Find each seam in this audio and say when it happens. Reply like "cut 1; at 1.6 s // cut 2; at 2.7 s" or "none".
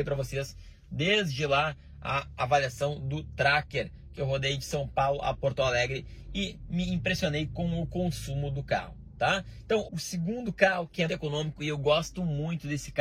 cut 1; at 9.8 s // cut 2; at 11.1 s